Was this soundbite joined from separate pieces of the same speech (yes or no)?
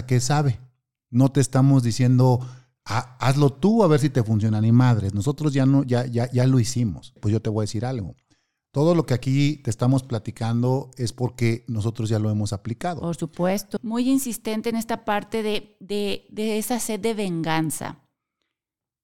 yes